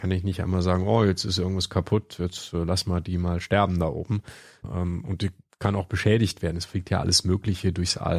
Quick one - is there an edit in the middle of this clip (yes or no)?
yes